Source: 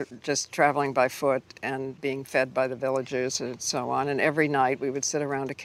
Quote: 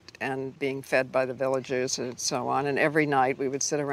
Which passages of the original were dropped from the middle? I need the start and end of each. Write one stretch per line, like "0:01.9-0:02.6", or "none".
none